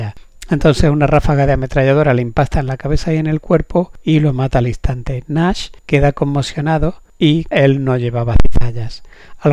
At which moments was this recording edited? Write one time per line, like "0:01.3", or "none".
0:07.5